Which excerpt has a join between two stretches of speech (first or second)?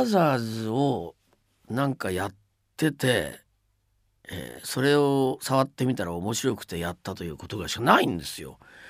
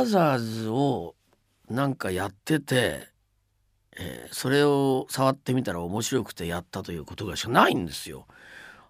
second